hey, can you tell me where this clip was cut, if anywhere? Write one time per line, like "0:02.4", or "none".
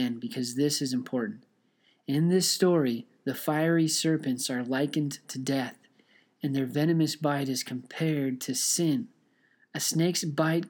none